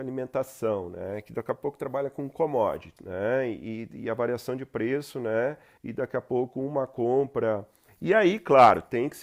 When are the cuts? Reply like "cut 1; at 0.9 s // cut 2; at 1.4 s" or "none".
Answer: cut 1; at 3.0 s // cut 2; at 5.8 s // cut 3; at 7.9 s